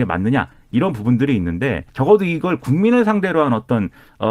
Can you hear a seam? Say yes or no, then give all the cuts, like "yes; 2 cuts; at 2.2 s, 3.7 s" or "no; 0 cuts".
yes; 1 cut; at 1.9 s